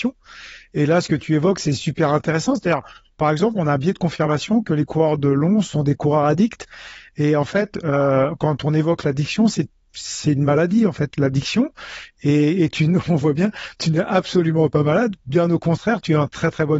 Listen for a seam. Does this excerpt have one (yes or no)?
no